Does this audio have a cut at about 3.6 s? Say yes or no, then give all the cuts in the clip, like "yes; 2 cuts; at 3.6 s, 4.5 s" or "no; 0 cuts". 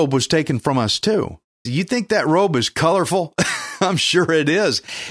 no; 1 cut; at 1.7 s